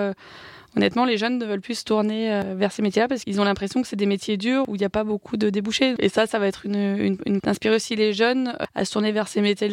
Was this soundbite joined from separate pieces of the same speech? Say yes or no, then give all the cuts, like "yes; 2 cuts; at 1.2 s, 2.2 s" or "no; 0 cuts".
yes; 2 cuts; at 6.0 s, 7.4 s